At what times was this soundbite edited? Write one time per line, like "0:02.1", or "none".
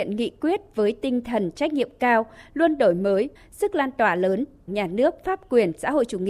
0:03.4
0:04.7